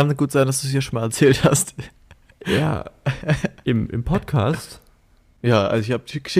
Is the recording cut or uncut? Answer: uncut